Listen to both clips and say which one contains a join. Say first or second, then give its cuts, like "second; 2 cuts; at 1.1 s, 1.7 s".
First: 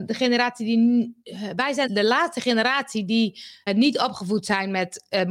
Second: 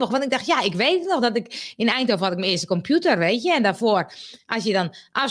first; 2 cuts; at 1.9 s, 3.7 s